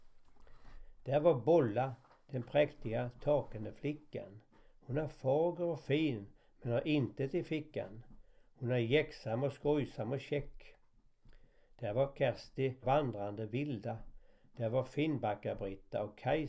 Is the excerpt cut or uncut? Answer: cut